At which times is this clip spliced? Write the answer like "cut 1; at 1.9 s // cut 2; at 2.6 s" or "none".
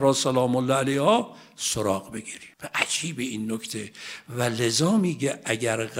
cut 1; at 2.5 s